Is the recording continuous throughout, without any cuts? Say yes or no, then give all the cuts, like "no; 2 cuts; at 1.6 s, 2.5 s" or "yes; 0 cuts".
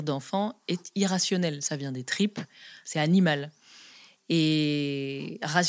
yes; 0 cuts